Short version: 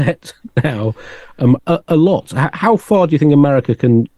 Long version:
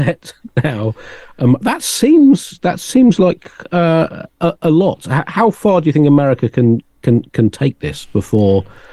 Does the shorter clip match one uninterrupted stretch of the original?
no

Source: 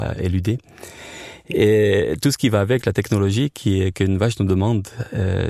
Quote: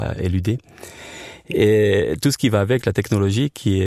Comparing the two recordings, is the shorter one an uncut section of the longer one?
yes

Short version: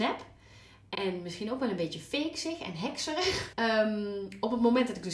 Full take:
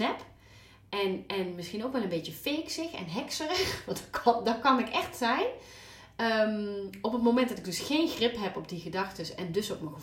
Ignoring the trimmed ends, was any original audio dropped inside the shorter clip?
yes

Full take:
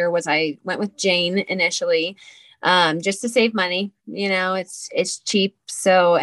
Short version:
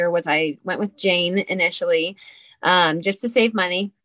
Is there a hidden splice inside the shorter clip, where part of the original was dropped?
no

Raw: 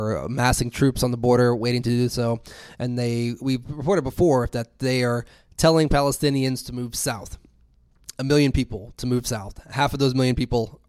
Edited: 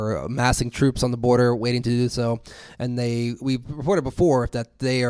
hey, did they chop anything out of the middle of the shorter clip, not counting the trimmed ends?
no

